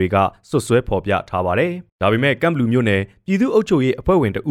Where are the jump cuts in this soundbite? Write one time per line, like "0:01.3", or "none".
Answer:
0:01.9